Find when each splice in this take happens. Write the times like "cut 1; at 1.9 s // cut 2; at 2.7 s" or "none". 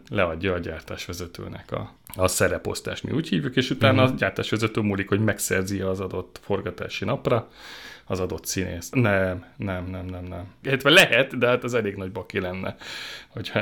cut 1; at 8.9 s // cut 2; at 10.6 s